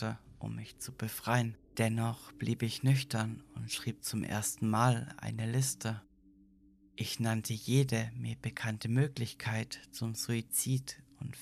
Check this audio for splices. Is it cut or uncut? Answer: cut